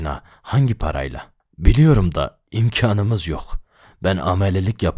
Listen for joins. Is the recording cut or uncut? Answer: cut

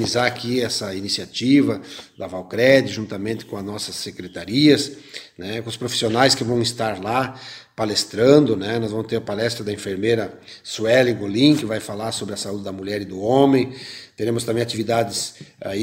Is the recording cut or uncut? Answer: uncut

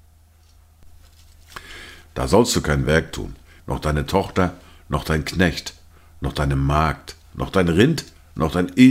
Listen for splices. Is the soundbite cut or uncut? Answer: cut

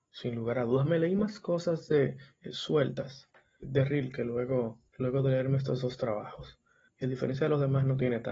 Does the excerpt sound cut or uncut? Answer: cut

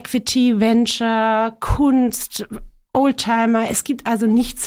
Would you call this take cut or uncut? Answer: uncut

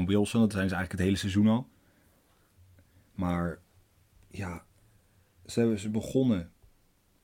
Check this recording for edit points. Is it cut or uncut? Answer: uncut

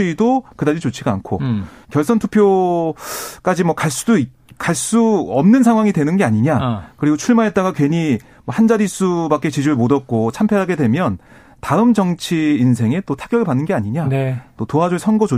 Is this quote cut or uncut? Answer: cut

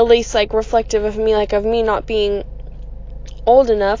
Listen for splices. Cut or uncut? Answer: uncut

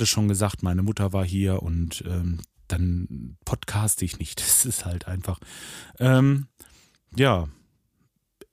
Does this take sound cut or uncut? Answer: uncut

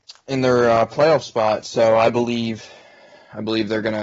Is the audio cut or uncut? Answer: uncut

